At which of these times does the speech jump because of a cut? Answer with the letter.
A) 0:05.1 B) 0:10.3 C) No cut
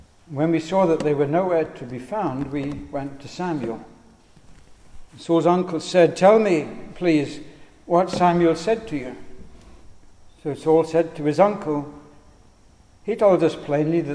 A